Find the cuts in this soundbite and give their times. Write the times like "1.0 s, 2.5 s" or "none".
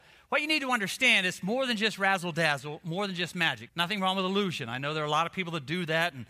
3.7 s